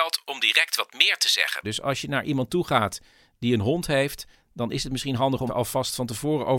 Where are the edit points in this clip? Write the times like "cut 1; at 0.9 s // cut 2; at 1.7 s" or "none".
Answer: cut 1; at 1.6 s // cut 2; at 5.5 s

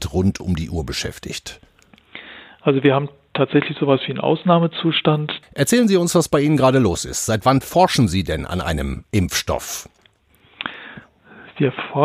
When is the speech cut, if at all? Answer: cut 1; at 5.4 s

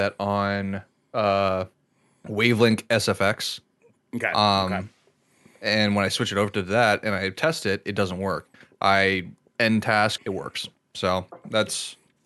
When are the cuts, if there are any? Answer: cut 1; at 10.2 s

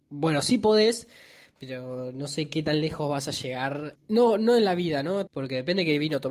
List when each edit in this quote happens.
cut 1; at 3.9 s // cut 2; at 5.3 s

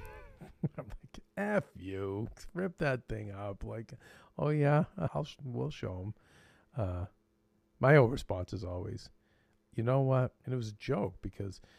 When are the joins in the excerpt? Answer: cut 1; at 5.1 s // cut 2; at 10.4 s

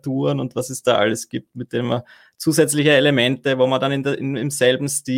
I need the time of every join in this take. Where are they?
none

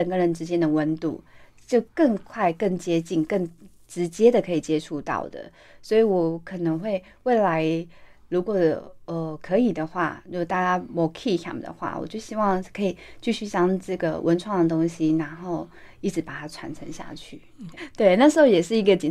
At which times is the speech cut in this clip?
cut 1; at 17.8 s

